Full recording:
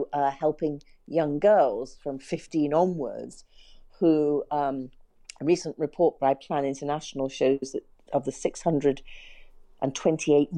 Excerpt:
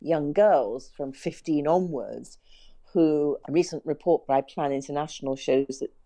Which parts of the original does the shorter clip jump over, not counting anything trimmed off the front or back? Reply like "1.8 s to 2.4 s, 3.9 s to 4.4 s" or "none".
4.5 s to 5.4 s

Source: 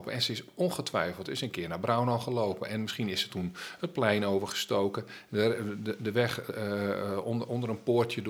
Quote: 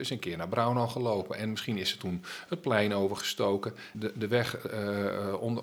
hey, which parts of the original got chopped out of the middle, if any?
5.3 s to 5.8 s

